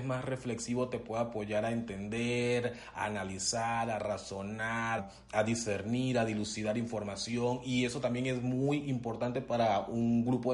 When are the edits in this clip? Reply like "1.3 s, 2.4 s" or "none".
5.0 s